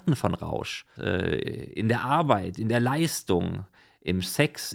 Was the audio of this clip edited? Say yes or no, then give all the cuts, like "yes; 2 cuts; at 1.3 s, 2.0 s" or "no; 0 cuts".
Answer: yes; 1 cut; at 1.0 s